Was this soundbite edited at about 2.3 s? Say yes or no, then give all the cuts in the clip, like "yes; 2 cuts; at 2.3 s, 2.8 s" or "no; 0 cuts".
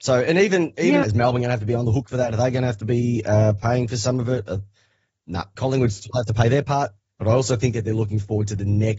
no; 3 cuts; at 1.0 s, 5.6 s, 7.1 s